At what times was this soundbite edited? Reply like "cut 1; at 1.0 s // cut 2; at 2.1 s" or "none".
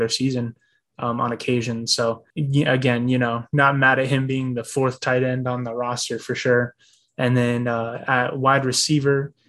cut 1; at 2.3 s